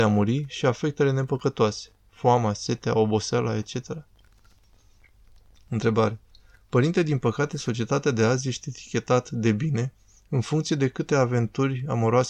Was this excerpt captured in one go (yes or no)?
yes